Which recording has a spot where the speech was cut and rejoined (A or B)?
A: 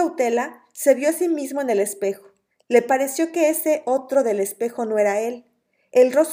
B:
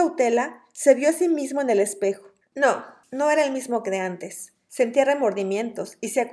B